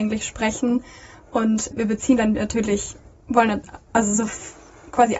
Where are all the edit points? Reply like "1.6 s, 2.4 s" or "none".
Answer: none